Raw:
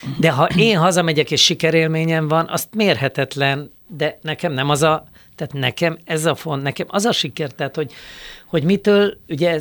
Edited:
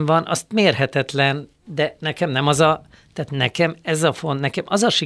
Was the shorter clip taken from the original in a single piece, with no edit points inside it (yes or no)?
yes